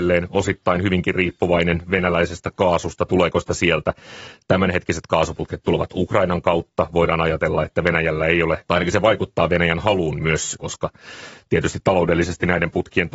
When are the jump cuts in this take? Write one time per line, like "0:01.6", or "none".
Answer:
0:08.7
0:10.6